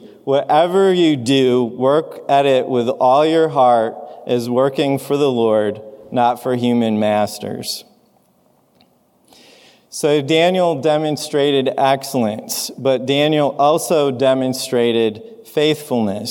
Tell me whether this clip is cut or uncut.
uncut